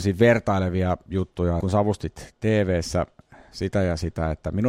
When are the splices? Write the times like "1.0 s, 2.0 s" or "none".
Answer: 1.6 s

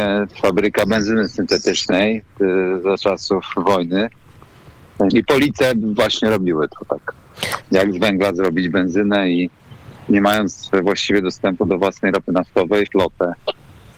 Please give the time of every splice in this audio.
5.1 s, 7.6 s, 12.9 s

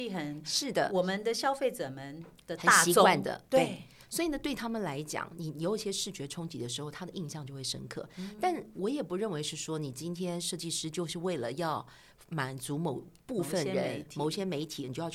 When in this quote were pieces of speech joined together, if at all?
none

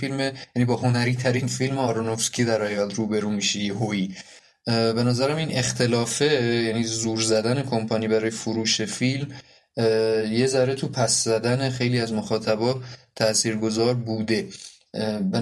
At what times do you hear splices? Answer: none

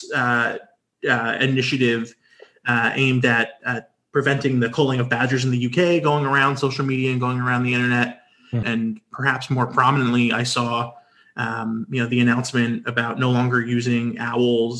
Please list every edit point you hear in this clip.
8.6 s

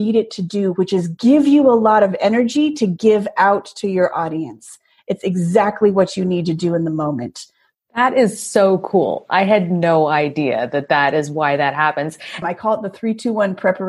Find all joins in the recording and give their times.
7.7 s, 12.4 s

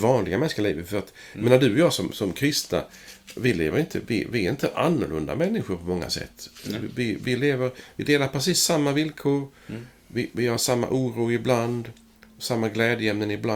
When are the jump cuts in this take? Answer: none

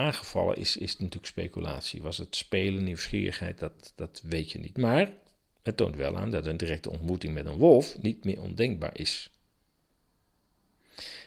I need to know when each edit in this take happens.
none

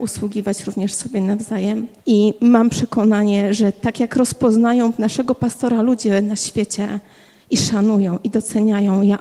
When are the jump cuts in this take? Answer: 2.0 s

